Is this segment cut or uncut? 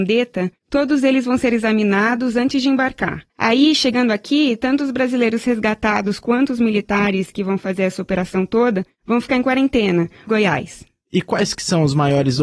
cut